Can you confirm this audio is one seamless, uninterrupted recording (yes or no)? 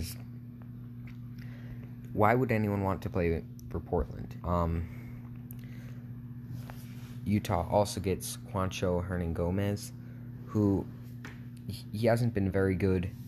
no